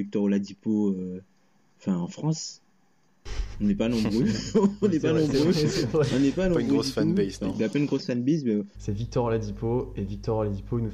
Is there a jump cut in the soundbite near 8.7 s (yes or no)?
yes